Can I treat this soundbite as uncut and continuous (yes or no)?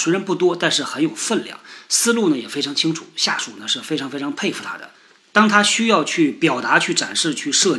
yes